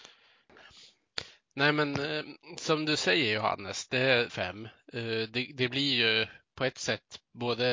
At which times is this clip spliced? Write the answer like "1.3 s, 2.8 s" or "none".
4.3 s